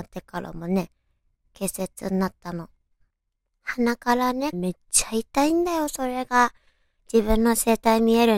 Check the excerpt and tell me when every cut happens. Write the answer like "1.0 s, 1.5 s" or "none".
4.5 s